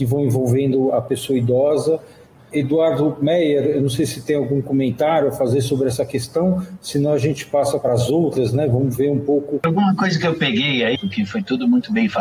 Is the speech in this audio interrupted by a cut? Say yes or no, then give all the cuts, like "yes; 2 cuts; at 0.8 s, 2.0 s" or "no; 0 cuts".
yes; 3 cuts; at 2.4 s, 9.6 s, 11.0 s